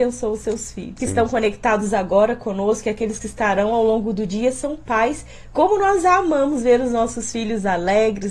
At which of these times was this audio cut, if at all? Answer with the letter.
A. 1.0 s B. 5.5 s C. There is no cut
A